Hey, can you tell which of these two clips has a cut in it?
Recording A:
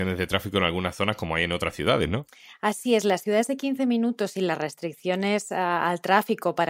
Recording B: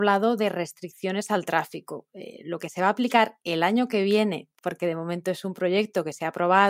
B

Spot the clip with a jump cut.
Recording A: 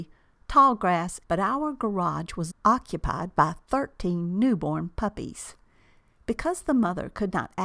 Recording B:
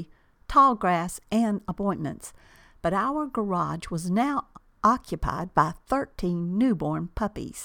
A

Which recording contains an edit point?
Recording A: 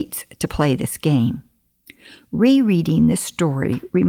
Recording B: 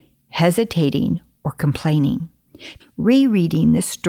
B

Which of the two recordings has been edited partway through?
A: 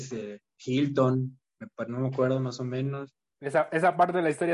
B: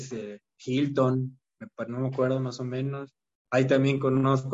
A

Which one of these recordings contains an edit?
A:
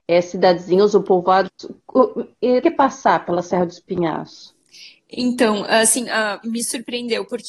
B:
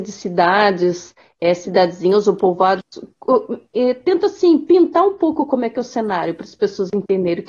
A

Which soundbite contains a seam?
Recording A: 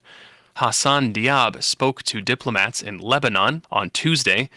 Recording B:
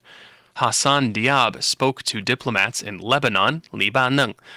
A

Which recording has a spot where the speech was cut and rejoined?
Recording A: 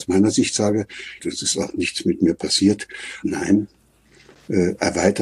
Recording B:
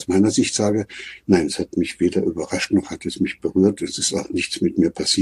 A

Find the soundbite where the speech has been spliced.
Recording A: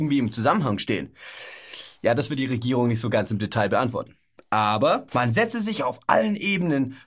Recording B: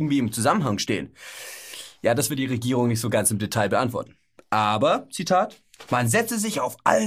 A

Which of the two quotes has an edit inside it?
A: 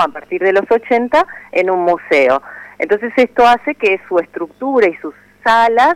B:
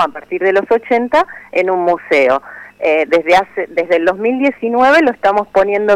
B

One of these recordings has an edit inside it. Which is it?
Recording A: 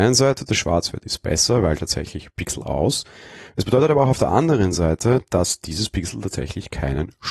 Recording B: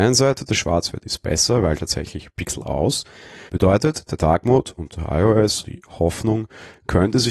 B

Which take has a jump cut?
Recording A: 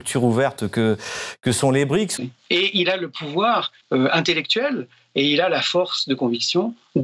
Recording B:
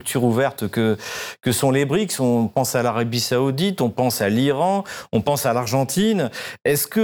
A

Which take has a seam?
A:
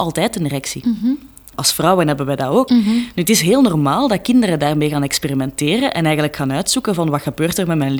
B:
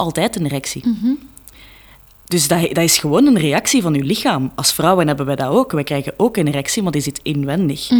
A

